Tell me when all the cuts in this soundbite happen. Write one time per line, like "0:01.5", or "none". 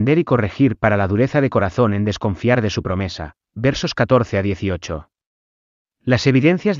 0:03.5